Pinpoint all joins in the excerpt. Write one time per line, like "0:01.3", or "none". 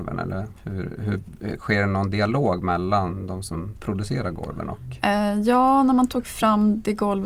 none

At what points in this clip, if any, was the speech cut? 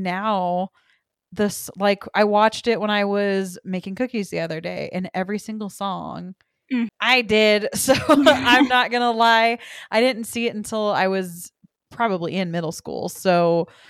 0:06.9

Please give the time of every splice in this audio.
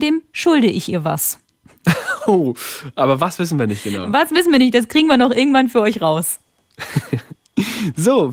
none

